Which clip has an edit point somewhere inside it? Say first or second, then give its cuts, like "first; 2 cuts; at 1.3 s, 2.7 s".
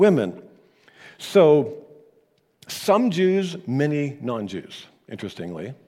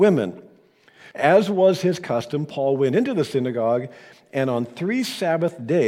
second; 1 cut; at 1.1 s